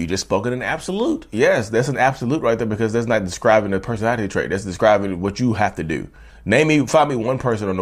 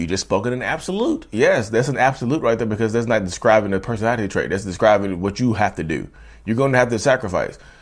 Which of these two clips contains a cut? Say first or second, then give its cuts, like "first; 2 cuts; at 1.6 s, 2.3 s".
first; 1 cut; at 6.3 s